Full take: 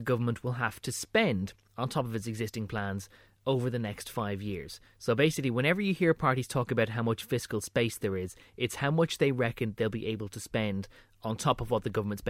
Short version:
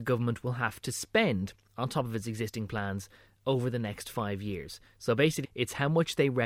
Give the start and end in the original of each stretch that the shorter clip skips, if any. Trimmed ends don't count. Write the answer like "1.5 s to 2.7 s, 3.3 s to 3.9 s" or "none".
5.4 s to 8.5 s